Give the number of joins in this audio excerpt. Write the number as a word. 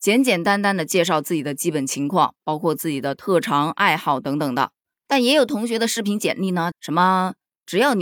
one